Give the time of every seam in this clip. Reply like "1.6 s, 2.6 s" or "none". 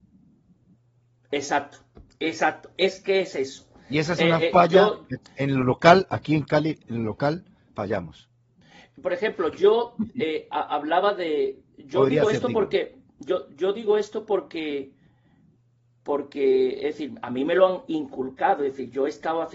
none